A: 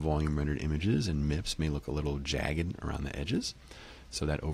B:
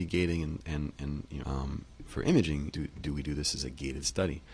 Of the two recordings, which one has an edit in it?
B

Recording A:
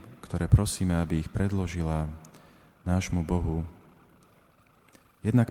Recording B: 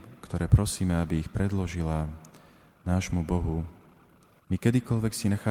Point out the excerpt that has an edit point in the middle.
B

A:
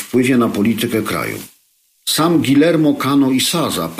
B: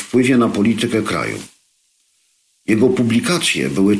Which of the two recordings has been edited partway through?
A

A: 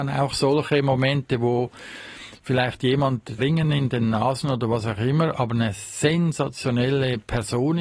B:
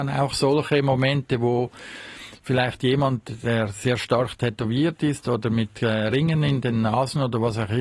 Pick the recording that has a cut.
A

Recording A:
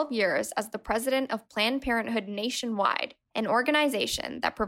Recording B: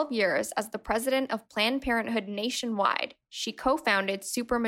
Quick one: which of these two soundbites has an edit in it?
A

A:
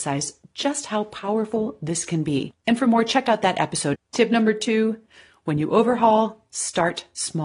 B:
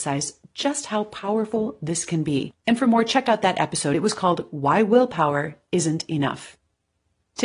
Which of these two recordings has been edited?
A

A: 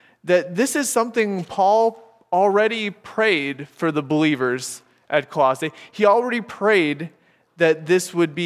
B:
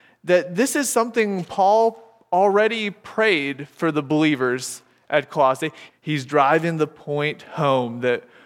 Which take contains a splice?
B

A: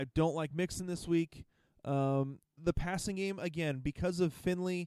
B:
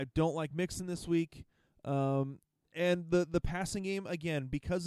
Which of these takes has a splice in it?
A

